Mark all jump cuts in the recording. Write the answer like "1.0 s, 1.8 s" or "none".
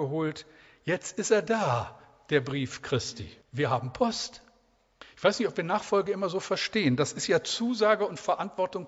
3.4 s, 5.0 s